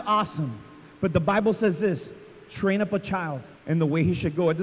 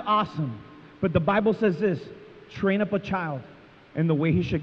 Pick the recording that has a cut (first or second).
first